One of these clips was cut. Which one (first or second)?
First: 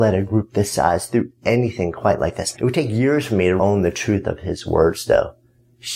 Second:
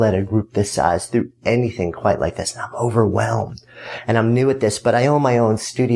first